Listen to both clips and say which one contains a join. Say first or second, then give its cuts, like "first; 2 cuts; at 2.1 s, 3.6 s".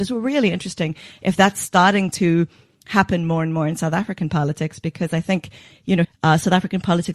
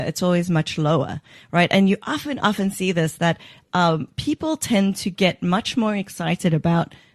first; 1 cut; at 6.0 s